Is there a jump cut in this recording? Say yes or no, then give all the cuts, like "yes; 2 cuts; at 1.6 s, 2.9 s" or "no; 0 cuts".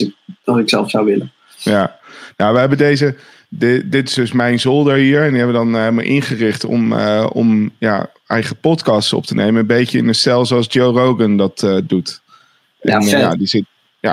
no; 0 cuts